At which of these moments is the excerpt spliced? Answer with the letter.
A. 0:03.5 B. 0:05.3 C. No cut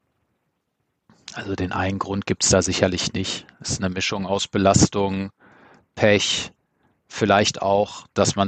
C